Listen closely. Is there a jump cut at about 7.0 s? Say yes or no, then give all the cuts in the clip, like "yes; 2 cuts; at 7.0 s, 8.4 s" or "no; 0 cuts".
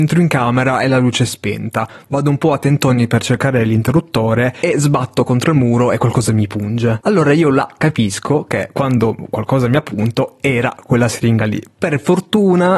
yes; 1 cut; at 7.0 s